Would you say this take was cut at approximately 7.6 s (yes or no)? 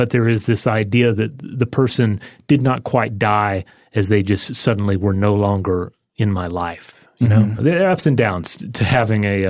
yes